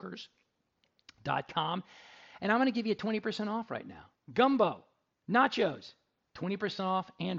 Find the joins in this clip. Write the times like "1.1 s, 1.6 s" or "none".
4.1 s, 6.2 s